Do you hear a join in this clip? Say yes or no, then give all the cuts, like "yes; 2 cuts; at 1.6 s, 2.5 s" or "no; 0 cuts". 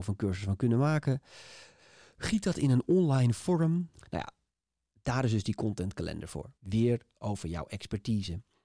yes; 2 cuts; at 4.0 s, 6.5 s